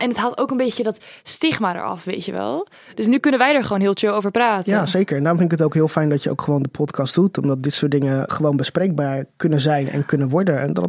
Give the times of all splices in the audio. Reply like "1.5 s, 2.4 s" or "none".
none